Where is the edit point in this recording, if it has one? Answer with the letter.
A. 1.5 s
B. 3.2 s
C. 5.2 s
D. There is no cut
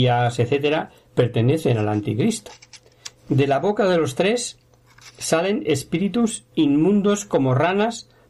B